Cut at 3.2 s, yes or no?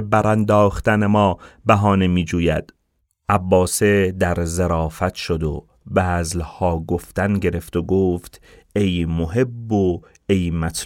no